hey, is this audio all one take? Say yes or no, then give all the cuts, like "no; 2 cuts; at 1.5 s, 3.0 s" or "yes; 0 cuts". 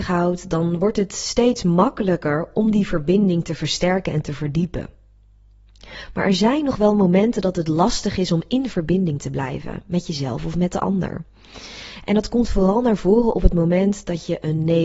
yes; 0 cuts